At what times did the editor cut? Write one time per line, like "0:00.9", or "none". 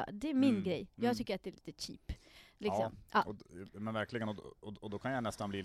none